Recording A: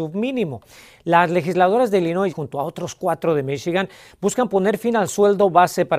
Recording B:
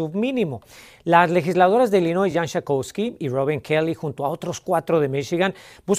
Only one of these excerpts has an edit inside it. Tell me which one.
A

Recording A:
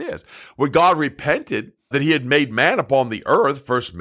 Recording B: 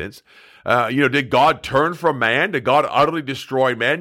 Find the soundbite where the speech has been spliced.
A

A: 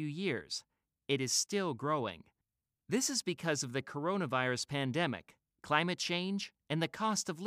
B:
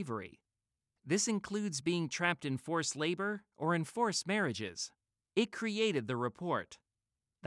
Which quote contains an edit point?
B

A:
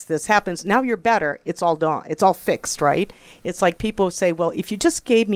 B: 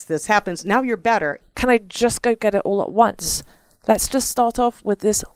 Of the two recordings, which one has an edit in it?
B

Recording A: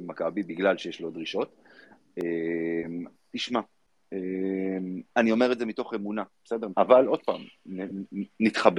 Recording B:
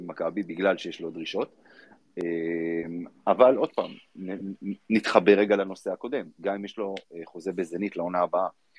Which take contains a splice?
A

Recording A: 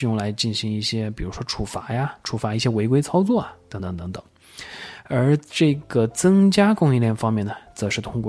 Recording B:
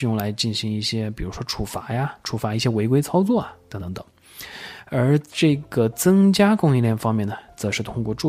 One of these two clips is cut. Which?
B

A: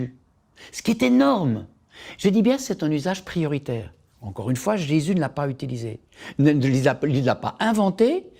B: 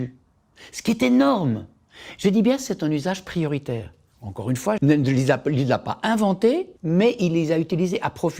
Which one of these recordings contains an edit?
B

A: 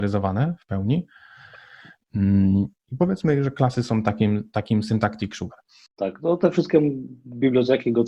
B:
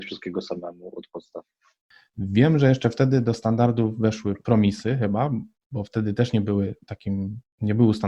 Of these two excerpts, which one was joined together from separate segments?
A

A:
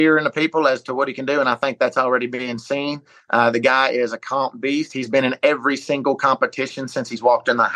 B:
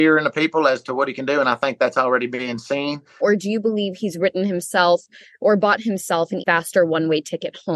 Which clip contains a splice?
B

